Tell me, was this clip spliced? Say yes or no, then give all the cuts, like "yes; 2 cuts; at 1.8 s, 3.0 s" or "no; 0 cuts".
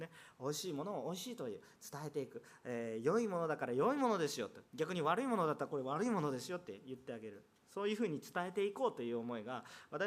yes; 1 cut; at 4.6 s